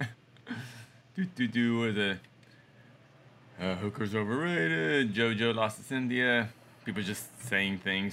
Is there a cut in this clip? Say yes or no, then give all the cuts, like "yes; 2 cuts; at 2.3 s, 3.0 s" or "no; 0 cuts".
no; 0 cuts